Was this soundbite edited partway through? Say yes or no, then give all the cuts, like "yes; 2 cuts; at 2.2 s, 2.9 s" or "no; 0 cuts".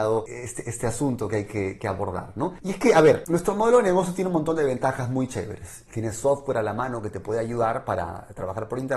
yes; 2 cuts; at 1.8 s, 5.9 s